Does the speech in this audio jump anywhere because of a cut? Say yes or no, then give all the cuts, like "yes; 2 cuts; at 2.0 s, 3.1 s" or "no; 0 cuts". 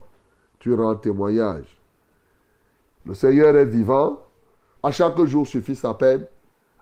yes; 2 cuts; at 3.0 s, 4.8 s